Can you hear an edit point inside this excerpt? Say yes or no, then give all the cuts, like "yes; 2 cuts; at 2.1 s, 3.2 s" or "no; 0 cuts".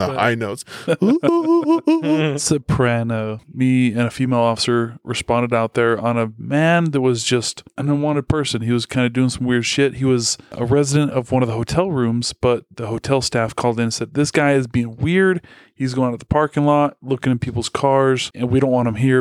yes; 1 cut; at 3.4 s